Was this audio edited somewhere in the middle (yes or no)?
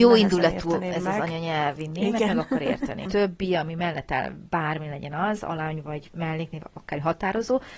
yes